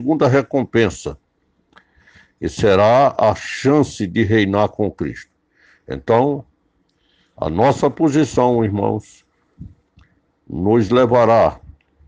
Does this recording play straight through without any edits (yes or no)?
yes